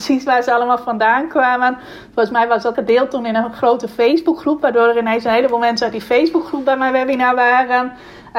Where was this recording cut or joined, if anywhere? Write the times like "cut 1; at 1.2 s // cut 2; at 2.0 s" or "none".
cut 1; at 2.7 s